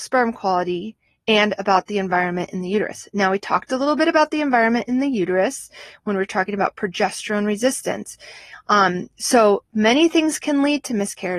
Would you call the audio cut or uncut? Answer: uncut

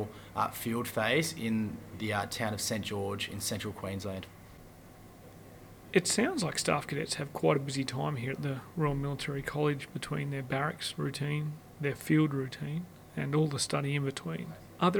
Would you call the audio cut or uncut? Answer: uncut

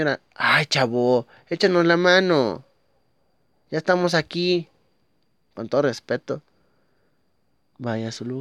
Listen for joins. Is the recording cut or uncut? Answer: cut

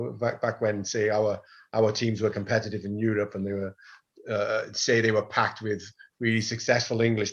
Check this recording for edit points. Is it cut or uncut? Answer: uncut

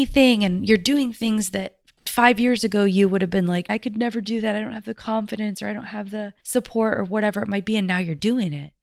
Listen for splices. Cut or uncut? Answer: cut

